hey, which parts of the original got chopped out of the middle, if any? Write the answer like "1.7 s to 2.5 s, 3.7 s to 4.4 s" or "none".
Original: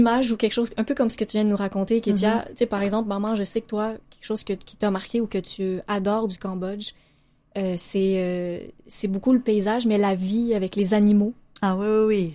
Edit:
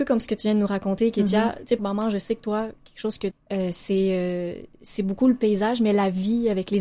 2.7 s to 3.0 s, 4.6 s to 7.4 s